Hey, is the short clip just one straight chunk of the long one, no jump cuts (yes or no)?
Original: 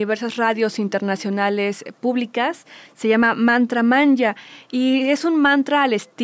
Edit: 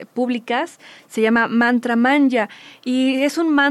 yes